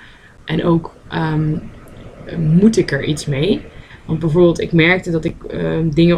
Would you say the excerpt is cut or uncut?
uncut